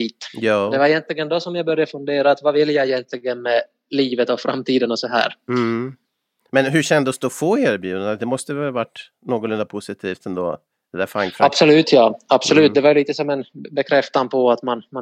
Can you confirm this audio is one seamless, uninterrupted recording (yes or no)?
yes